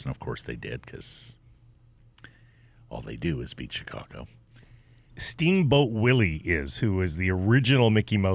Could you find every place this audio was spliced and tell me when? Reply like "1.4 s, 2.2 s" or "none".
5.1 s